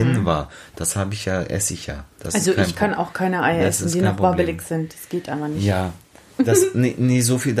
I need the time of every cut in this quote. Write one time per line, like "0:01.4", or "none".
none